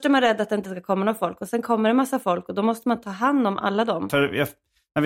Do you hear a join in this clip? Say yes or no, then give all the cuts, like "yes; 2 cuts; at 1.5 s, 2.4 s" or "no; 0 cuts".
yes; 1 cut; at 4.1 s